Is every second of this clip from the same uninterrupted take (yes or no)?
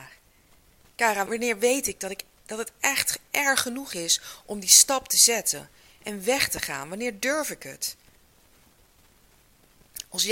no